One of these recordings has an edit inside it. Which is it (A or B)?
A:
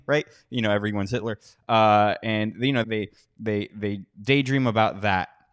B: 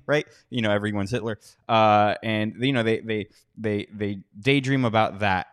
A